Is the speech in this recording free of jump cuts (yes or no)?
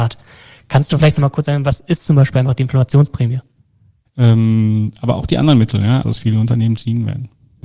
no